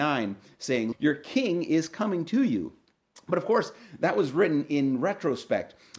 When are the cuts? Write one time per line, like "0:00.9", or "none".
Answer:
0:00.9